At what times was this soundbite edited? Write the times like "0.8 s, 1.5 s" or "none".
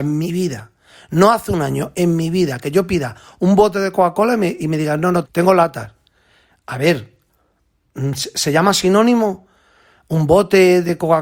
5.2 s